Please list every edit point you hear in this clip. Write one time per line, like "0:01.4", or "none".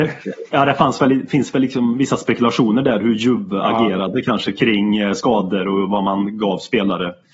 none